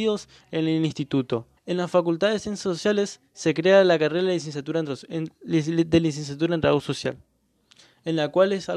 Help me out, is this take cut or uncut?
cut